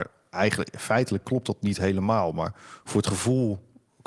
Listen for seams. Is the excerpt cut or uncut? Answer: uncut